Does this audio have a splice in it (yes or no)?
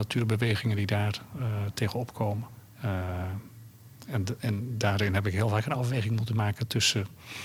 no